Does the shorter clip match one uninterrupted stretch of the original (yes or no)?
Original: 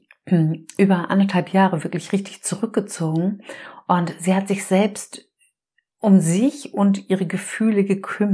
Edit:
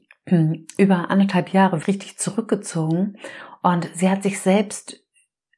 no